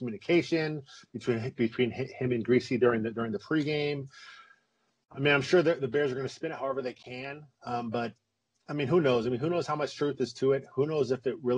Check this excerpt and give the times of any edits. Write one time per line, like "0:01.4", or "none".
none